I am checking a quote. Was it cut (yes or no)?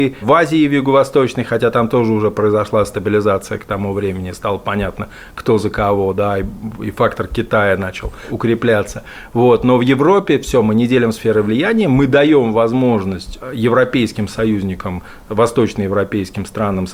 no